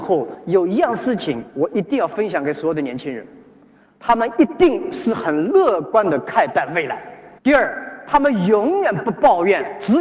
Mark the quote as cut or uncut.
cut